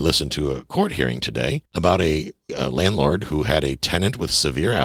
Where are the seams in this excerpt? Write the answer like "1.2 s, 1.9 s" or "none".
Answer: 2.5 s